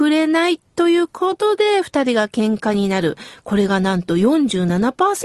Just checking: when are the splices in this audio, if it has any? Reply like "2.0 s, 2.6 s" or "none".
none